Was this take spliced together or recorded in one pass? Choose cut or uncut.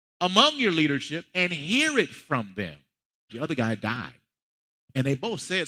cut